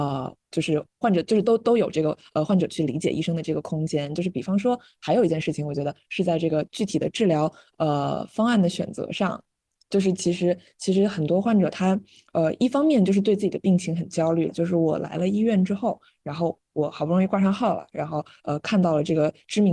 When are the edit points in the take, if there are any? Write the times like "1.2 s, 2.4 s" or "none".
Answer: 1.0 s, 14.5 s

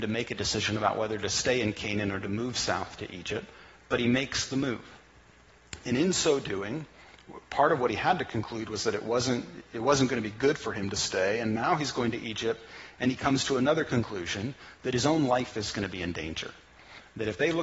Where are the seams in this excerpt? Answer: none

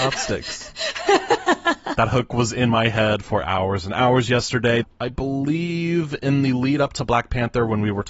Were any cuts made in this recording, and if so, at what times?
4.8 s

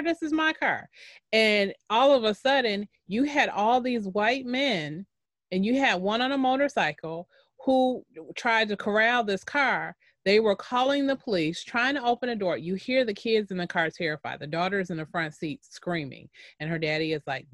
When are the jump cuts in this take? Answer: none

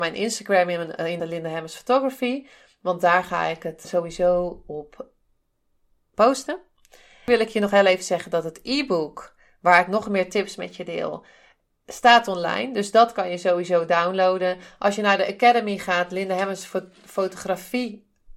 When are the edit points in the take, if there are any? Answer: 1.2 s, 3.8 s

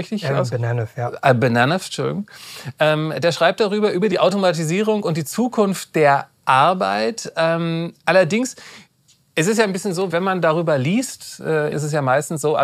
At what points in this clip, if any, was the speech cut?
10.1 s, 11.7 s

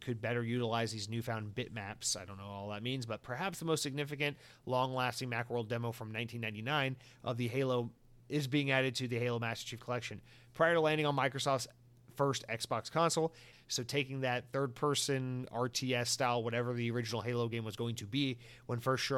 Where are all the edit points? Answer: 13.5 s

